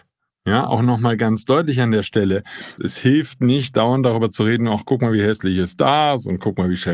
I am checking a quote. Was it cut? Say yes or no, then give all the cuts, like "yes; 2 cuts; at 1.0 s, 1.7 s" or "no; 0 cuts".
yes; 1 cut; at 2.8 s